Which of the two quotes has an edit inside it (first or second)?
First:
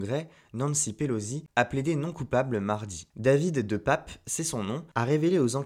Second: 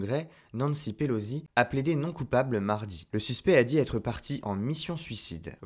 second